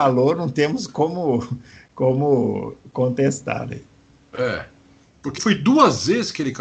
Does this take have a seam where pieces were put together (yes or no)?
yes